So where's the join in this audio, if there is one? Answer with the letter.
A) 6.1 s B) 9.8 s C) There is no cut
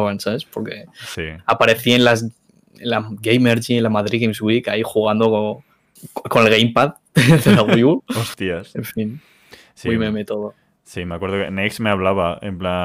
C